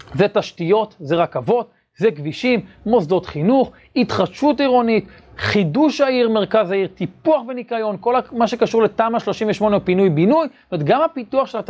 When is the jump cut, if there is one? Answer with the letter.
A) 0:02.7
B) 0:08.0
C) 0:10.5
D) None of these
D